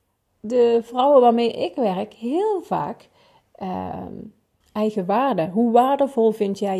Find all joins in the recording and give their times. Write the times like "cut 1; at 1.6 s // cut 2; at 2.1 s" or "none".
cut 1; at 4.6 s